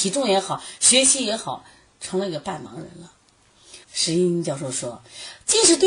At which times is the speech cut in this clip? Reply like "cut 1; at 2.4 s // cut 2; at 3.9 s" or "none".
cut 1; at 3.8 s